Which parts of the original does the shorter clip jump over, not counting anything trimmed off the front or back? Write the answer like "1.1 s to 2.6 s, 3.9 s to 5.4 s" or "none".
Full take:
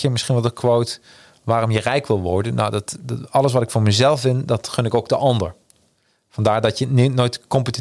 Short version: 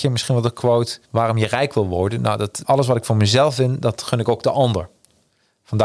1.0 s to 1.4 s, 3.0 s to 3.3 s